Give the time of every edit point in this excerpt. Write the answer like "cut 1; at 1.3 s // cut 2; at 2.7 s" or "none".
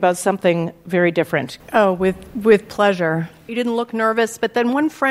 cut 1; at 1.6 s // cut 2; at 3.5 s